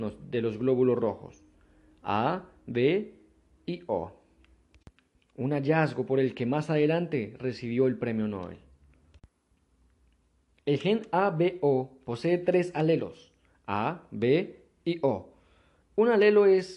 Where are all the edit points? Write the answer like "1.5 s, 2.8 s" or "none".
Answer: 15.8 s